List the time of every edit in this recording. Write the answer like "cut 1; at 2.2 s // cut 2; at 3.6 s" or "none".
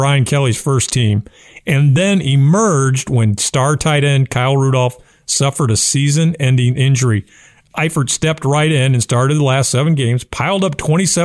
none